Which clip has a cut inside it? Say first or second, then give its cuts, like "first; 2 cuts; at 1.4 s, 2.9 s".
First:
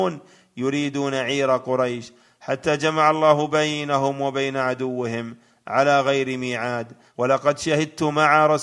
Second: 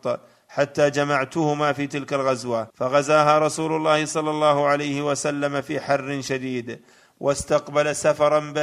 second; 1 cut; at 2.7 s